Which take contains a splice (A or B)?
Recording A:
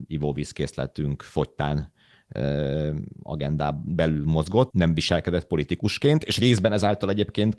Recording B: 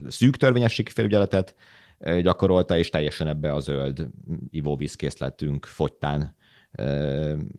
A